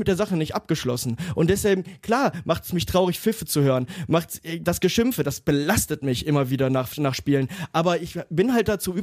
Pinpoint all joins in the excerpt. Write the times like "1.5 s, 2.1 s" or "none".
none

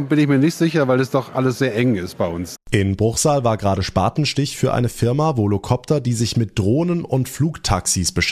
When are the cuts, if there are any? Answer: 2.5 s

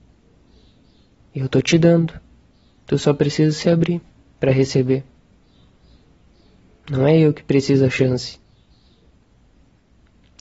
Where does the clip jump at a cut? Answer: none

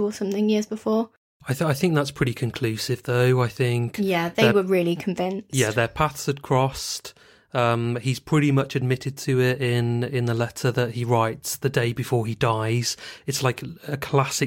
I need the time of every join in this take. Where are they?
none

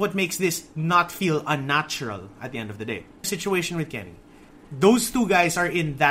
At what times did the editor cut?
3.2 s

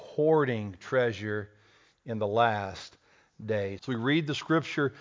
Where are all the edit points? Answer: 3.8 s

